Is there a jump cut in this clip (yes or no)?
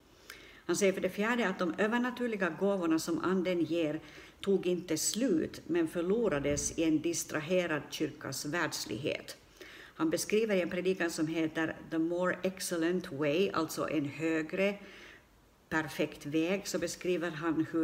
no